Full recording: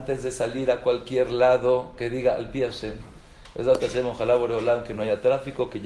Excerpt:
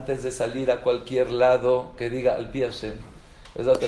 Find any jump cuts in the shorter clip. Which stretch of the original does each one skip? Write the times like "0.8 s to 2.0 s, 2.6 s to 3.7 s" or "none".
none